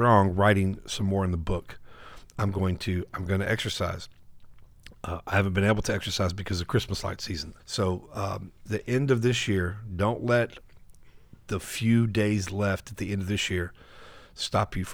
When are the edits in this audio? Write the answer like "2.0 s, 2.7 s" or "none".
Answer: 7.6 s, 8.7 s